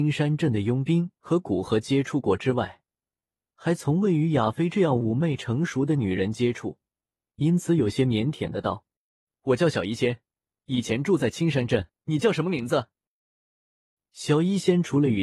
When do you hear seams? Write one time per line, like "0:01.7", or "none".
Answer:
0:07.3
0:11.9